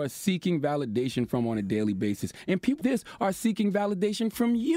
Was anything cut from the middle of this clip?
yes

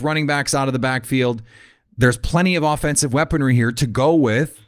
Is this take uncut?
yes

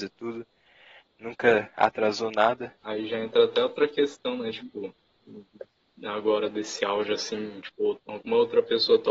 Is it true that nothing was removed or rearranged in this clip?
no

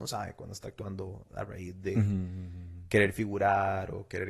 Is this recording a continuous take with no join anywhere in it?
yes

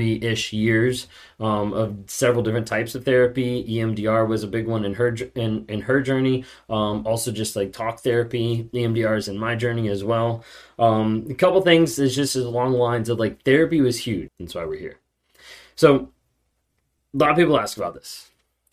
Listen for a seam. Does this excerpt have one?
yes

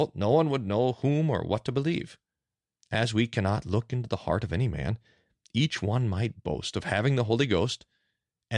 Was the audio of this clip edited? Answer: yes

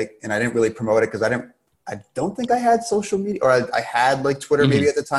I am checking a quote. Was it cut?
no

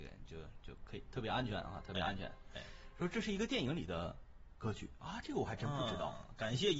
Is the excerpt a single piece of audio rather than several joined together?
yes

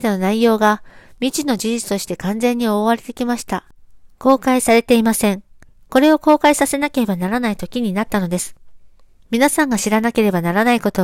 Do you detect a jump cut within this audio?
no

